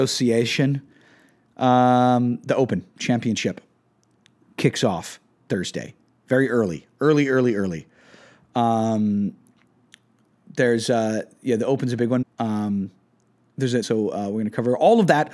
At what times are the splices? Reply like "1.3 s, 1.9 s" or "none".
12.2 s, 13.8 s